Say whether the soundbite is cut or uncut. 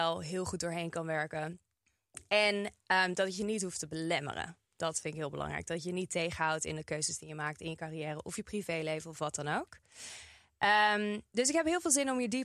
uncut